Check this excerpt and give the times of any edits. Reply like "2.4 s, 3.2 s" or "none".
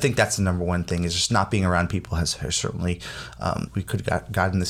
3.7 s